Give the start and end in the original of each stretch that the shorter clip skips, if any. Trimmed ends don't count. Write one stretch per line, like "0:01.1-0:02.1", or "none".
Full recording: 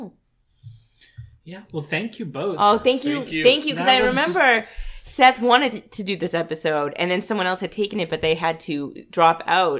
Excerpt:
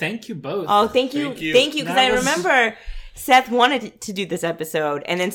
none